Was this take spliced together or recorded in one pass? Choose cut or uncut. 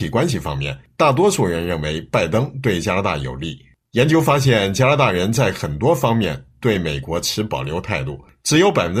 uncut